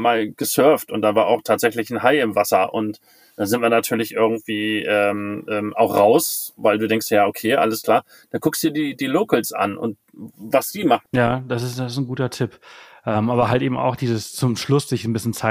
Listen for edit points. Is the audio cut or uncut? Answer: cut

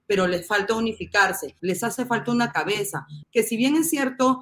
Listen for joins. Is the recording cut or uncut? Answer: cut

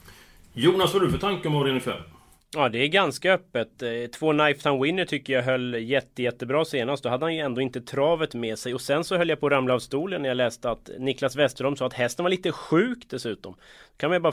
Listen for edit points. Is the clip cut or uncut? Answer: uncut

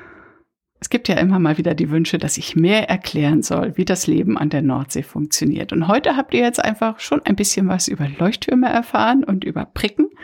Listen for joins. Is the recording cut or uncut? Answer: uncut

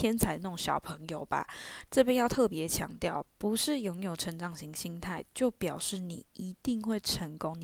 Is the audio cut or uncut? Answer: cut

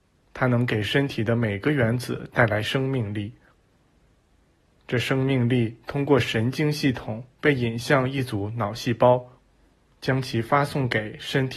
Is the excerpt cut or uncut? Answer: cut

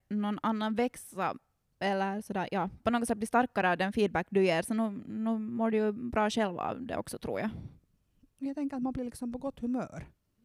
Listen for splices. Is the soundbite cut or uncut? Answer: uncut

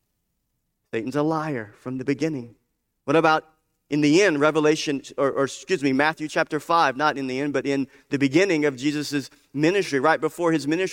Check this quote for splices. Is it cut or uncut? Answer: uncut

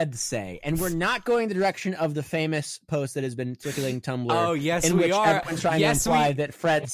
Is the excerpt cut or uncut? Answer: uncut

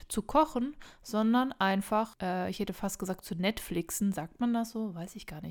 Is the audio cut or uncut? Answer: uncut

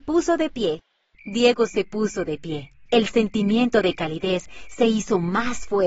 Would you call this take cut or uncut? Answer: cut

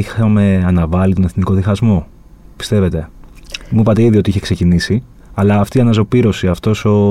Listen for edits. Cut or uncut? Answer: uncut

